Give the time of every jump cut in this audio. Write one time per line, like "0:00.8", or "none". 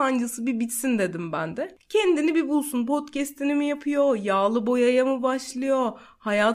none